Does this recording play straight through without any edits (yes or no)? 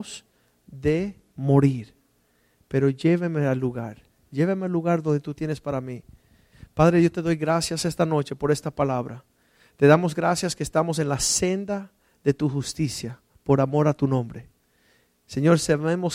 yes